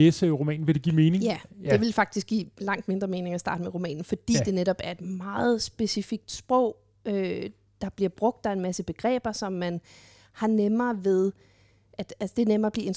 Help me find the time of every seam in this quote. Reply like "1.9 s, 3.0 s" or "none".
none